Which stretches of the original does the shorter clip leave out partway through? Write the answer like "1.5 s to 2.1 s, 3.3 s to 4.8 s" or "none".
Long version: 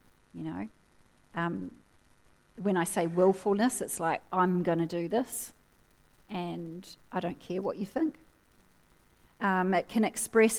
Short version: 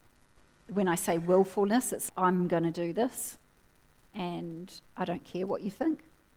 4.0 s to 4.2 s